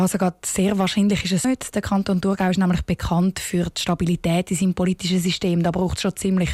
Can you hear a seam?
yes; 1 cut; at 1.4 s

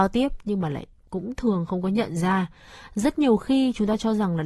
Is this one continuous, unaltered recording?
yes; 0 cuts

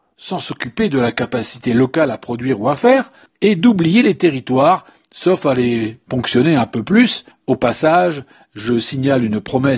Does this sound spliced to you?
no; 0 cuts

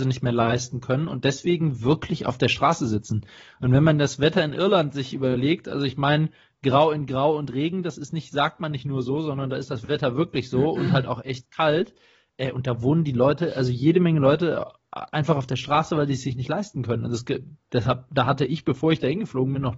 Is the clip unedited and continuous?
yes; 0 cuts

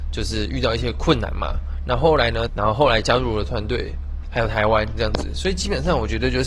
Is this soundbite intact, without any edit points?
no; 2 cuts; at 2.5 s, 4.2 s

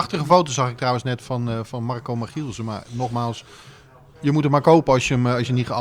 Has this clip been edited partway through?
no; 0 cuts

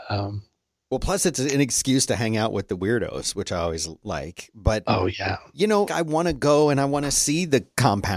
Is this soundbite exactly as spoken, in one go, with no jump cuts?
no; 1 cut; at 5.9 s

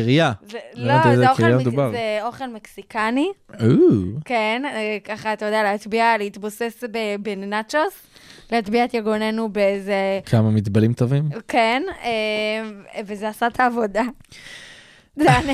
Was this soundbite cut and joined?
no; 0 cuts

